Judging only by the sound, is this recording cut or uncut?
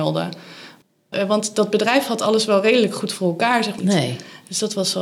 cut